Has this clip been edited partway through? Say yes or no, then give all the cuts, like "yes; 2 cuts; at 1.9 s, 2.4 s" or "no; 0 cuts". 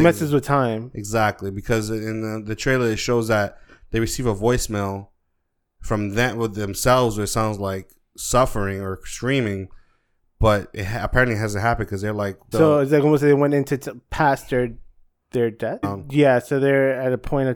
yes; 2 cuts; at 12.5 s, 15.8 s